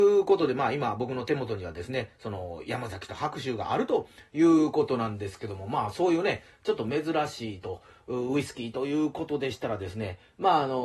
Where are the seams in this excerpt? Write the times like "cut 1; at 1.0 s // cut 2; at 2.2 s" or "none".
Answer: none